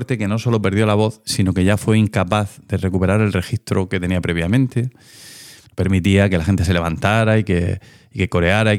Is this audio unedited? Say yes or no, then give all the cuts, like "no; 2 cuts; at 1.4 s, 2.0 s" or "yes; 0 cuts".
no; 1 cut; at 5.6 s